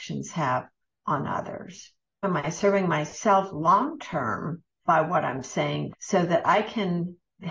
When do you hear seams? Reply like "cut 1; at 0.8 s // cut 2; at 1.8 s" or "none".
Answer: cut 1; at 2.2 s // cut 2; at 4.8 s // cut 3; at 5.9 s